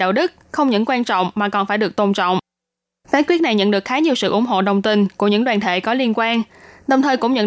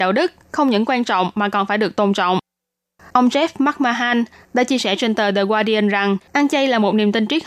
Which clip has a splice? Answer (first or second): second